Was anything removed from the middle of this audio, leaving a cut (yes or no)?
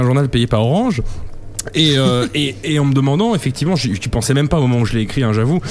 no